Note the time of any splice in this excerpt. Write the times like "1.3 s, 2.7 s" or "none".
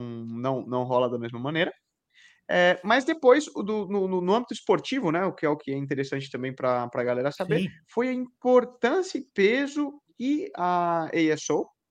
none